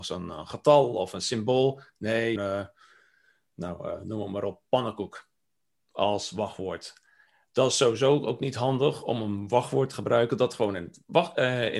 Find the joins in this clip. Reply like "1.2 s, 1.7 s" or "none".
2.4 s